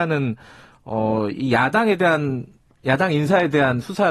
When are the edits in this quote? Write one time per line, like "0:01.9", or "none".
none